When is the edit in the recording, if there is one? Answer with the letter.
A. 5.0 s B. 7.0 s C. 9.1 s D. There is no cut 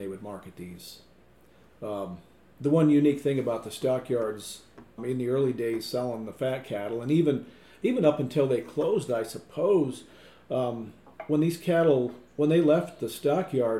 A